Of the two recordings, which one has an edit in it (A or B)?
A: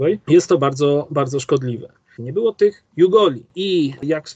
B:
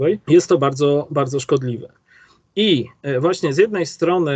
A